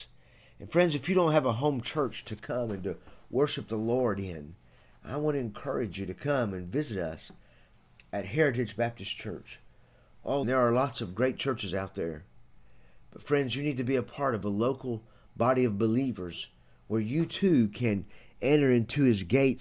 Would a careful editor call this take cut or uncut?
cut